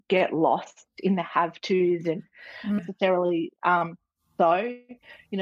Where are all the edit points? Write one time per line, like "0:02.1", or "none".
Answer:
0:02.8